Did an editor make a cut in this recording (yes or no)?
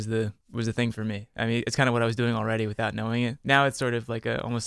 yes